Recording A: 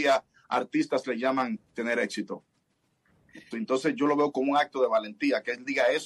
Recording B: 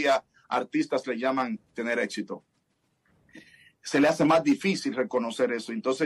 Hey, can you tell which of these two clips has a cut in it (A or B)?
A